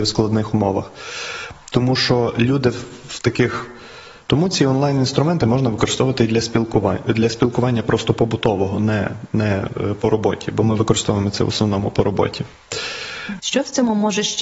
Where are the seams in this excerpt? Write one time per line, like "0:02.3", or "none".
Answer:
0:04.3
0:13.4